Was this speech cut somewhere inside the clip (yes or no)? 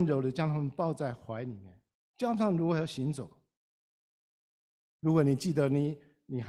no